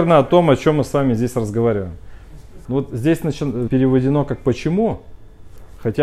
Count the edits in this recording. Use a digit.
2